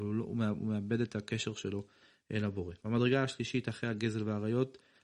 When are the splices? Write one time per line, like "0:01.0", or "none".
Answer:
0:02.8

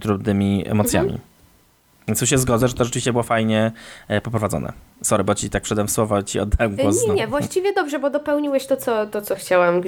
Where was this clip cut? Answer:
none

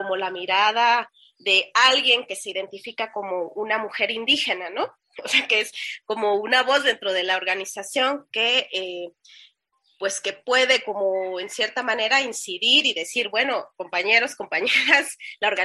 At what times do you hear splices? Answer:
none

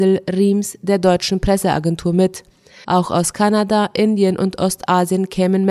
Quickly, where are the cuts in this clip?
0:02.8

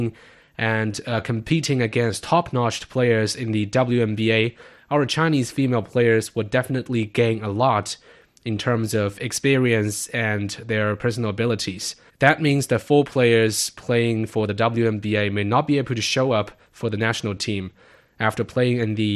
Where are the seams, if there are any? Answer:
0:12.1
0:18.0

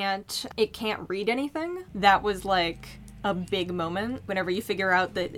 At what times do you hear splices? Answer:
0:01.9

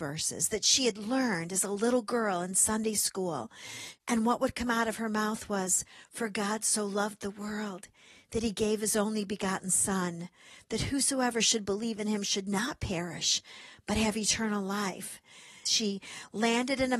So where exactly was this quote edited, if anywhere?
0:04.0
0:15.7

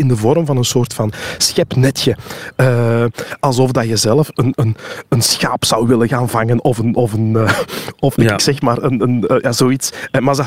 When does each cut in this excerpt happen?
none

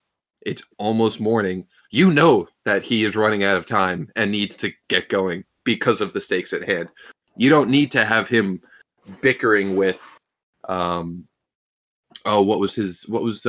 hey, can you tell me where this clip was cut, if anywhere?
none

